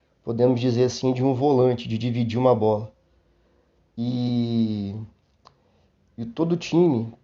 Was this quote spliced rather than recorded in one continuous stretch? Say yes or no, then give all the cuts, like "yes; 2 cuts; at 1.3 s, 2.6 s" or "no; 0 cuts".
no; 0 cuts